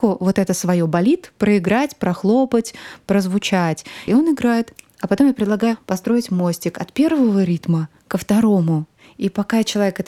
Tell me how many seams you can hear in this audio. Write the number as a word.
one